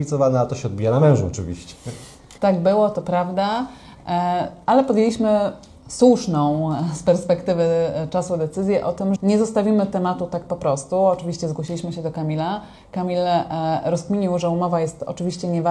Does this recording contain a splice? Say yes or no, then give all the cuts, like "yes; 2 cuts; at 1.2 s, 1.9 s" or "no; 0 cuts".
yes; 2 cuts; at 2.4 s, 9.2 s